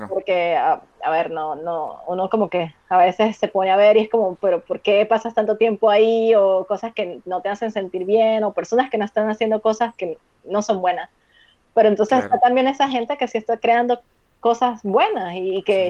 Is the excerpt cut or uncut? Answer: uncut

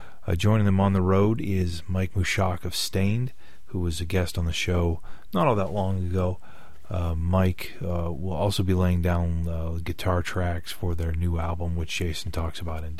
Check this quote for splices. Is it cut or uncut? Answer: uncut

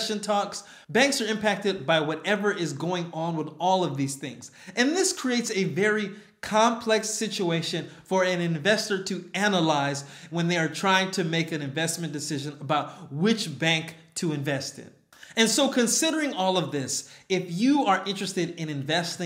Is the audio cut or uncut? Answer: uncut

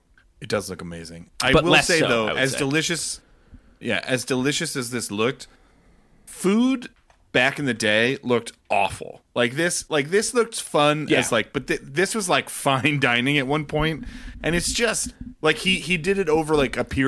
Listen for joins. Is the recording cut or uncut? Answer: uncut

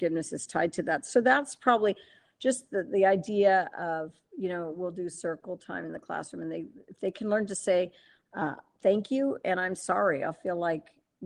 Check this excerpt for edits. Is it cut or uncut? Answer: uncut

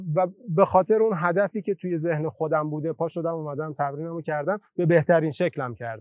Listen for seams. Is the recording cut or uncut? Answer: uncut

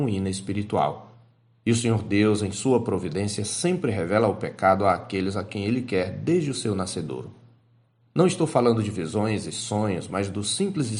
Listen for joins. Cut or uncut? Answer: uncut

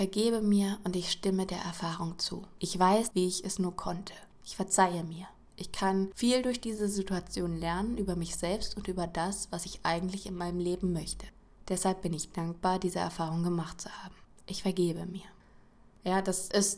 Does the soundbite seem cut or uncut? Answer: cut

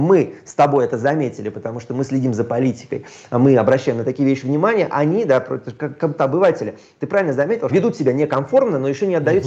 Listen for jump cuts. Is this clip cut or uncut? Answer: cut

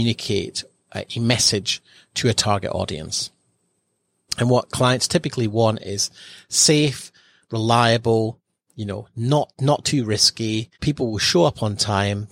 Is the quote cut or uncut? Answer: cut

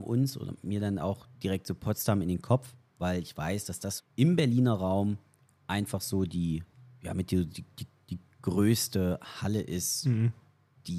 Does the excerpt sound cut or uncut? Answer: cut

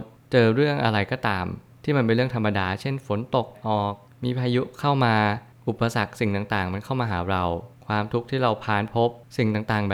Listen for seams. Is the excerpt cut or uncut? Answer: cut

